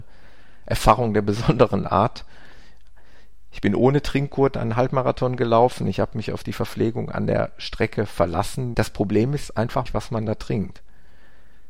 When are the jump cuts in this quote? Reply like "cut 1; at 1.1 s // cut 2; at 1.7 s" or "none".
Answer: cut 1; at 8.7 s // cut 2; at 9.9 s